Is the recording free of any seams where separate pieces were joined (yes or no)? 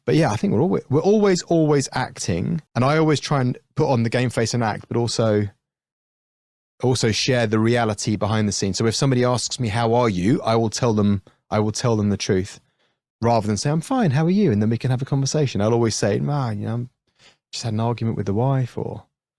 no